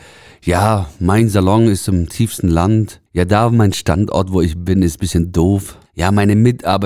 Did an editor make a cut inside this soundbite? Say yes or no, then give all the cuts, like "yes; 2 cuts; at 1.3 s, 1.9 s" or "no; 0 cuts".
yes; 2 cuts; at 3.1 s, 5.9 s